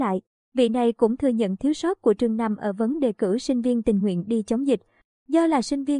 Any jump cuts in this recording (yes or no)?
no